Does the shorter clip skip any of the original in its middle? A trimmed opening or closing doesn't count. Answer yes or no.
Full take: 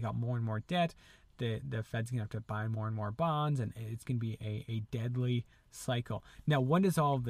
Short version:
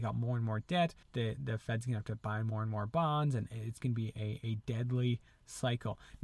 yes